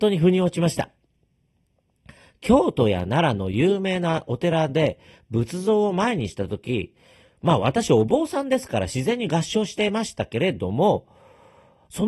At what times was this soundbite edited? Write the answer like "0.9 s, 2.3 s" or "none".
none